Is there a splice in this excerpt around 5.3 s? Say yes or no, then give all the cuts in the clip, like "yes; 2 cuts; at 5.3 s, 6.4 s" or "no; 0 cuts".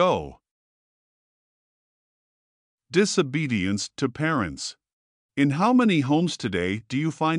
yes; 1 cut; at 5.3 s